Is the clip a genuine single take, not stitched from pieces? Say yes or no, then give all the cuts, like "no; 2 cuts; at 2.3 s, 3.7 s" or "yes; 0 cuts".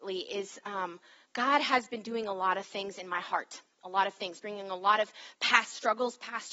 yes; 0 cuts